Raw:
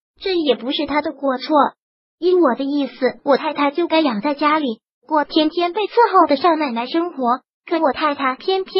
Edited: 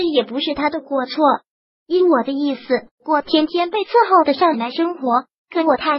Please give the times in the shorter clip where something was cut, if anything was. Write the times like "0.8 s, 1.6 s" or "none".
2.9 s, 4.5 s